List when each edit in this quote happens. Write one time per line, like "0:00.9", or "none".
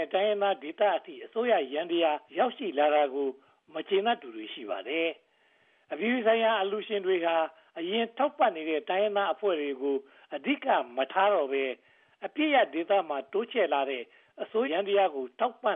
0:02.3
0:14.6